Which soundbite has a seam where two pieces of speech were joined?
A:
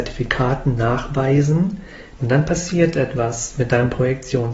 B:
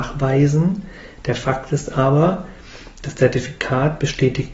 A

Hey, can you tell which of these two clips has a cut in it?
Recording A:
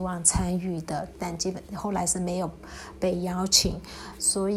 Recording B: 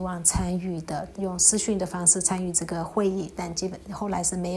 A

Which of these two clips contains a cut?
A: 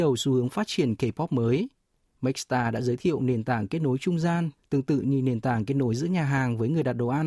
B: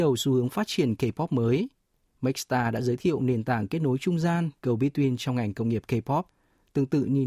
A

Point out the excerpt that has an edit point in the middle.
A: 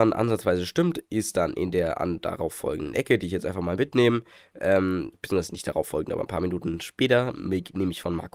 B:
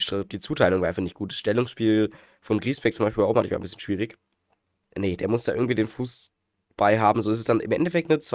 B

